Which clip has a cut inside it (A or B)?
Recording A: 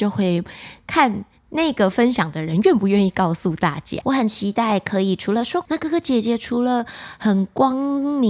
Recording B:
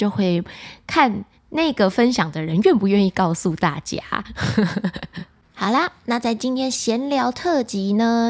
A